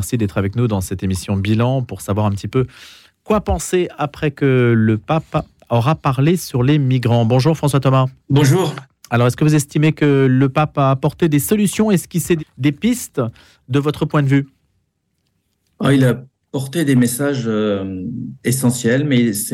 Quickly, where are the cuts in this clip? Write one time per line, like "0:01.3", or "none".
0:08.2
0:12.4